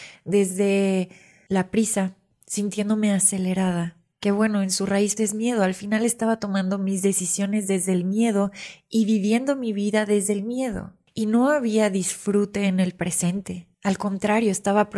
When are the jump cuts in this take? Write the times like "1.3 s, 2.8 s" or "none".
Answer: 5.2 s